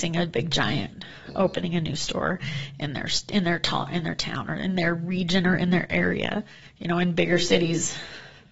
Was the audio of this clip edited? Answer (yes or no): no